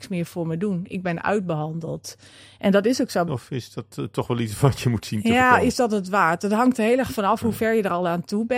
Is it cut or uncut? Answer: cut